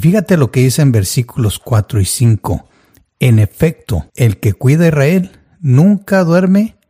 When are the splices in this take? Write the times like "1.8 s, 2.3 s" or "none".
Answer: 4.1 s